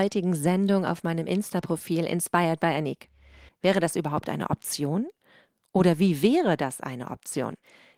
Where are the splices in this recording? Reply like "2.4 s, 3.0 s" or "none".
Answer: 3.5 s